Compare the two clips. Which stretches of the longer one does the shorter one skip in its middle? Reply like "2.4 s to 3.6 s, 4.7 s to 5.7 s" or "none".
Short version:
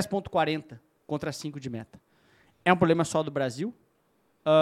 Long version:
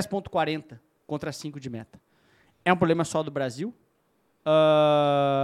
none